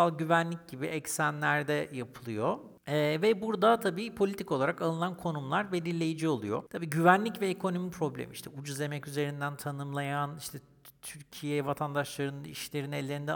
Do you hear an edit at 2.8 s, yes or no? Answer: no